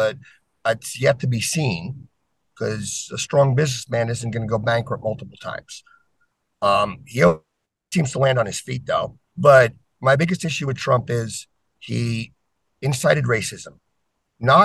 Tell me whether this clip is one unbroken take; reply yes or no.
no